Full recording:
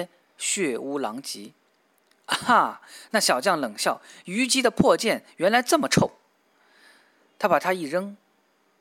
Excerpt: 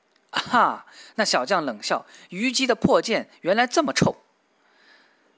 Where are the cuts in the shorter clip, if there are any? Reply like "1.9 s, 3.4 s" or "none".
none